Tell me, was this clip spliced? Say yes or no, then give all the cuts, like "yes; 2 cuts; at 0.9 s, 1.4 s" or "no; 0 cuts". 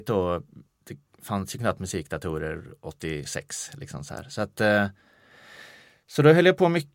no; 0 cuts